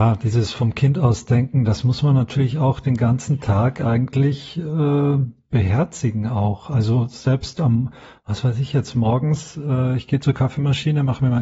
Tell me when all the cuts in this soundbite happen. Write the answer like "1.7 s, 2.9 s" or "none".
none